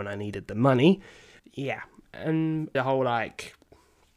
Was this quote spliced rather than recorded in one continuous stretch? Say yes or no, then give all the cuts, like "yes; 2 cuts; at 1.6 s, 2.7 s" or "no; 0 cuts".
yes; 2 cuts; at 1.4 s, 2.7 s